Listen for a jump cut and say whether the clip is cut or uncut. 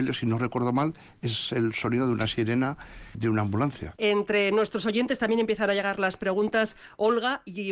cut